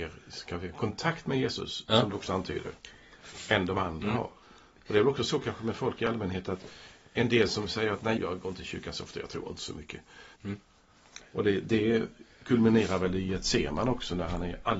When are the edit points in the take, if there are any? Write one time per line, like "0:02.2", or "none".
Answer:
0:04.4
0:08.2
0:10.3